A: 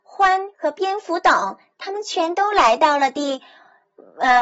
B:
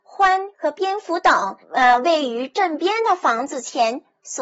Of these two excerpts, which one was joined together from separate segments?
B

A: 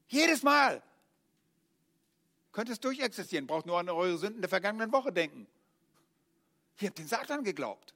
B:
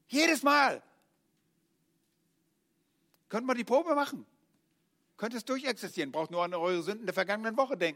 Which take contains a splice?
A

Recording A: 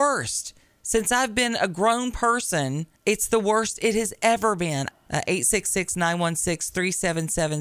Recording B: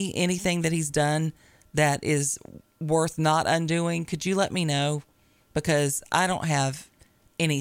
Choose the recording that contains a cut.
A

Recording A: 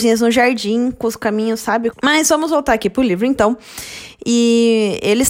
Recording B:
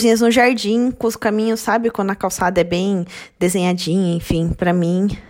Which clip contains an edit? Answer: A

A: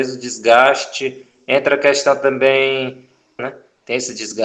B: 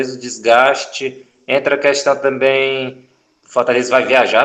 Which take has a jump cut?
A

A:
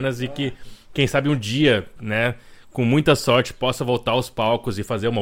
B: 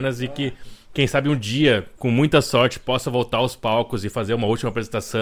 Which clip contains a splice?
B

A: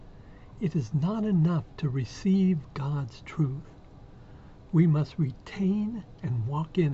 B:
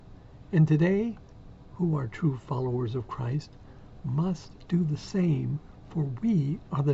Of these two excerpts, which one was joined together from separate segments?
B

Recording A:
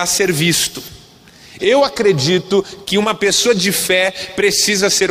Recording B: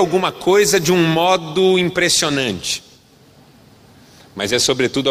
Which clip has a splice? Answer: A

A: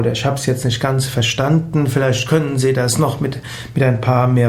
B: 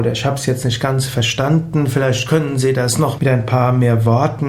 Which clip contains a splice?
B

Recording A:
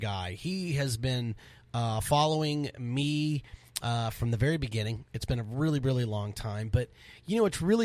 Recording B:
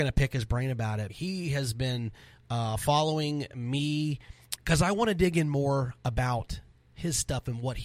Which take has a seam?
B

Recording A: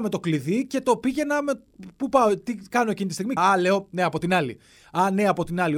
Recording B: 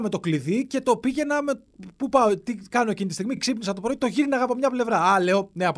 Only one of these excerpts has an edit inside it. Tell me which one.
A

